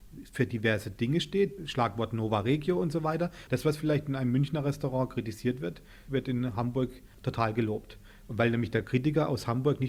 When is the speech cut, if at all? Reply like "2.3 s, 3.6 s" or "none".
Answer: 1.6 s, 3.5 s